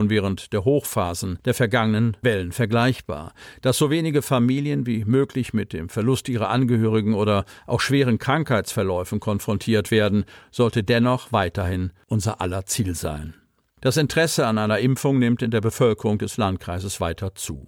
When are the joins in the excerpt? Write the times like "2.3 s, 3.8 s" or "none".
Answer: none